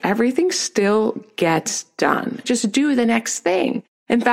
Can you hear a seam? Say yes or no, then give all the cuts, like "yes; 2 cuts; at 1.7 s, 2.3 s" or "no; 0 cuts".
yes; 1 cut; at 2.4 s